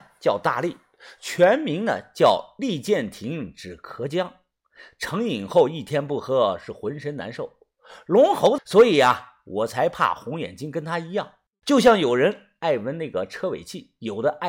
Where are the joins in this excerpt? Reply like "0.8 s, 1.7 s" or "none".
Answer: 8.6 s, 11.6 s